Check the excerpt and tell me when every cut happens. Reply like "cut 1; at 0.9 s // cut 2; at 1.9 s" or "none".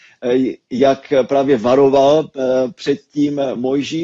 none